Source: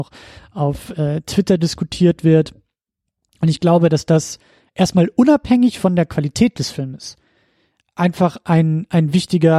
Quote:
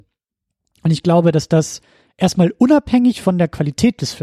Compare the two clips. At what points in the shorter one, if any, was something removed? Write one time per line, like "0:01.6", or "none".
none